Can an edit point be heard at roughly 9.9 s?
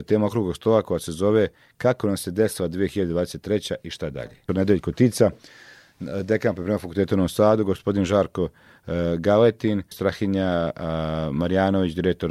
yes; 2 cuts; at 4.5 s, 9.9 s

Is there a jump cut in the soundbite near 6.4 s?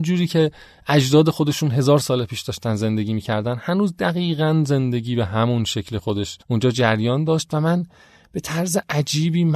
yes; 1 cut; at 6.4 s

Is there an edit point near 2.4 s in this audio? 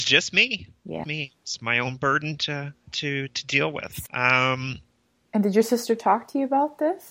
no; 2 cuts; at 1.0 s, 4.1 s

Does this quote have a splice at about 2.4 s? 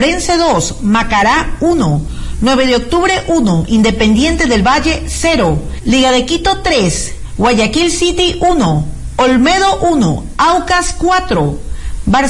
no; 0 cuts

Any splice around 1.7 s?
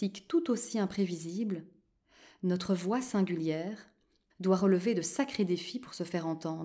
no; 1 cut; at 4.3 s

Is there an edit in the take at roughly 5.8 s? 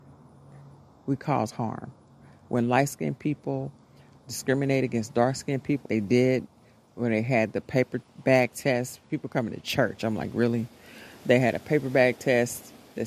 yes; 1 cut; at 5.8 s

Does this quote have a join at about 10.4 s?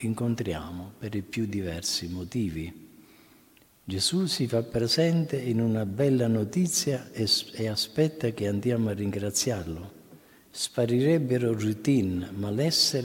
yes; 1 cut; at 10.4 s

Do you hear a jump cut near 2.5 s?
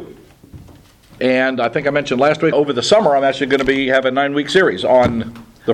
yes; 2 cuts; at 1.2 s, 2.5 s

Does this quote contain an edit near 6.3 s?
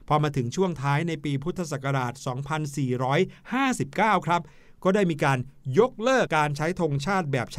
yes; 1 cut; at 6.3 s

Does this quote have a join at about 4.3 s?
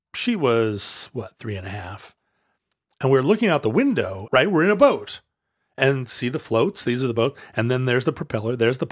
yes; 1 cut; at 4.3 s

